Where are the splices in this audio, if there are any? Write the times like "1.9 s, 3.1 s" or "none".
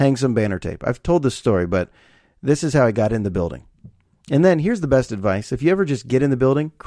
none